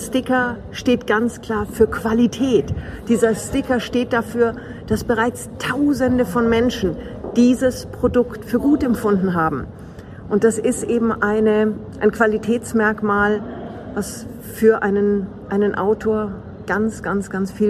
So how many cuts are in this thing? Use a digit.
0